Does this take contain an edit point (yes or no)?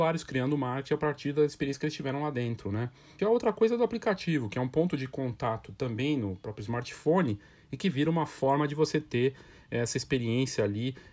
yes